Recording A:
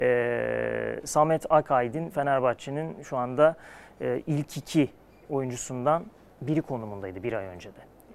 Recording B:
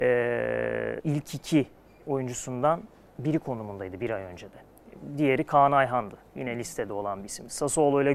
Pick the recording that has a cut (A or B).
B